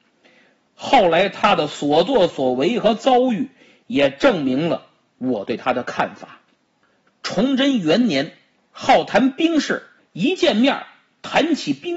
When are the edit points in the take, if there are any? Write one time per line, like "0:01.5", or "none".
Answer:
0:08.6
0:10.0